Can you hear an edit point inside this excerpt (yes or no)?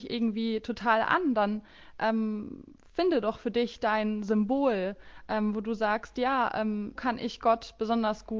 yes